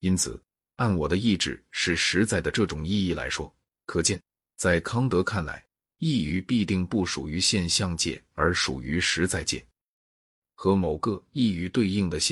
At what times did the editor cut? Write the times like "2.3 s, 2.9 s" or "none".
3.7 s